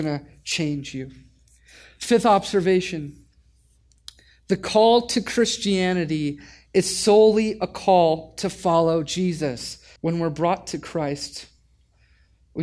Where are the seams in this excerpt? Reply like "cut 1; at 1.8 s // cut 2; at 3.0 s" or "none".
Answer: cut 1; at 10.0 s